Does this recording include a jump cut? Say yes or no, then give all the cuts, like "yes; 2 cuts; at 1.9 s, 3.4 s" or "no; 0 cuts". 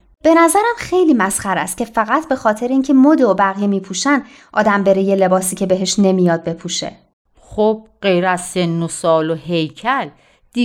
no; 0 cuts